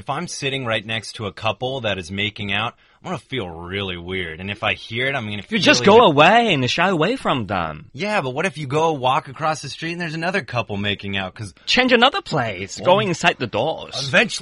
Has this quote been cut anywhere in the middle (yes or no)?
no